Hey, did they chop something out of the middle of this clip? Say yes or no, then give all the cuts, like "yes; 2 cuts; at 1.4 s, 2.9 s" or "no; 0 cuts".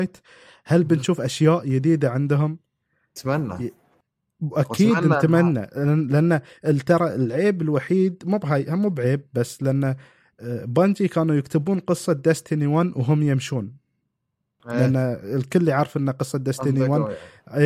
no; 0 cuts